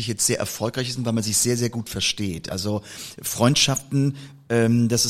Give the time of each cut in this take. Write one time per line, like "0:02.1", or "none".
none